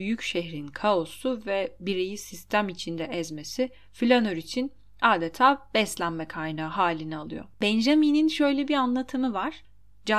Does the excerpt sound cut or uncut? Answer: cut